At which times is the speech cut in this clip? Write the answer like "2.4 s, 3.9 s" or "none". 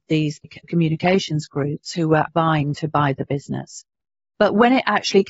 2.3 s

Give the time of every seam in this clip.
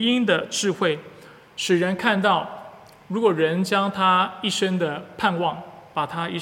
none

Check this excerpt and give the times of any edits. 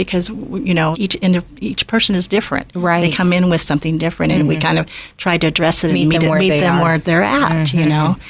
0.9 s

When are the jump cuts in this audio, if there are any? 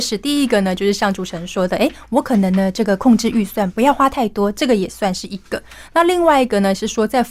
none

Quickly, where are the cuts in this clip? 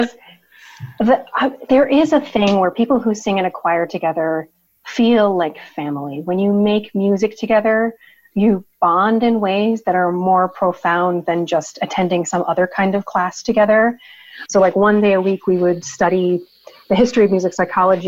14.5 s

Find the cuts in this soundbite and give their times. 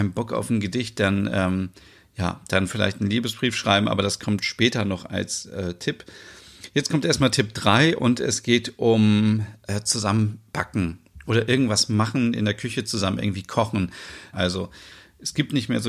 14.3 s

